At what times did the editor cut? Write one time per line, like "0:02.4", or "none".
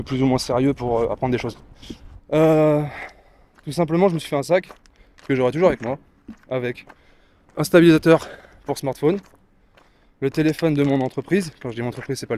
0:02.2